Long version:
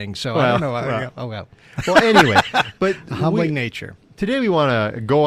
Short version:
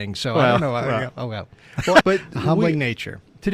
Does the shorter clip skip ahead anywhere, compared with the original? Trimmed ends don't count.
yes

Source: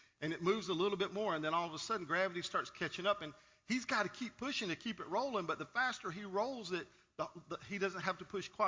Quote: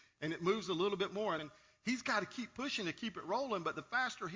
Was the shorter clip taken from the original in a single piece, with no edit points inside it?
no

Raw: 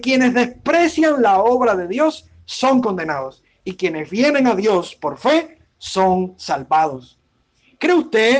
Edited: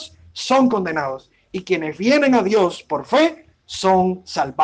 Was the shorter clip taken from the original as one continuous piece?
yes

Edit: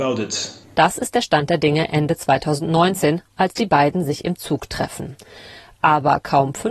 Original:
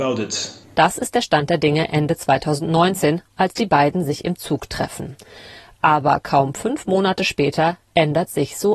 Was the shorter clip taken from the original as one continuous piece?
yes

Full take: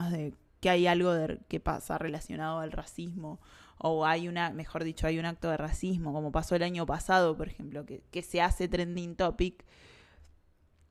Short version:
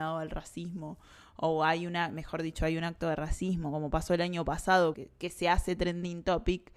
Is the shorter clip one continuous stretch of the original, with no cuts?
no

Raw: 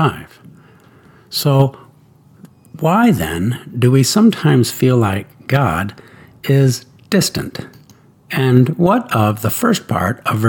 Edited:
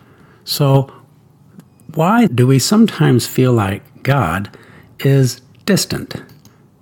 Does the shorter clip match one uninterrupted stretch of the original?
no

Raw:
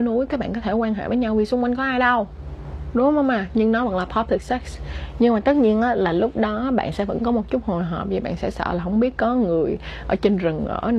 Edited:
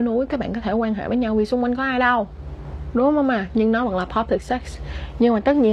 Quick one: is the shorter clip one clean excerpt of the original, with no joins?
yes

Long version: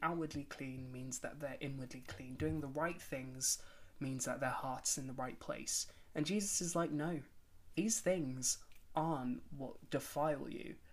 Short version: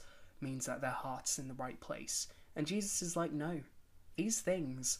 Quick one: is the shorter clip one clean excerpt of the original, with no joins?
yes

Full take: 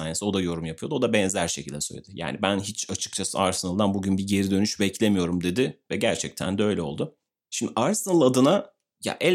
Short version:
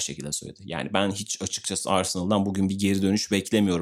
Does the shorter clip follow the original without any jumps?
yes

